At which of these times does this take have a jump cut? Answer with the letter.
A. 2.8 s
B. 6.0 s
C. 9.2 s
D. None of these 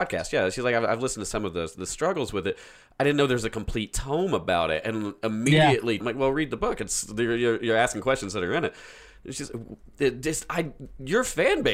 B